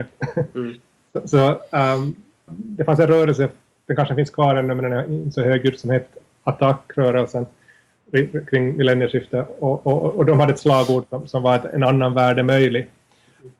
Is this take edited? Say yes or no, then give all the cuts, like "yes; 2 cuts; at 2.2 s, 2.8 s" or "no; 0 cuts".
yes; 1 cut; at 2.5 s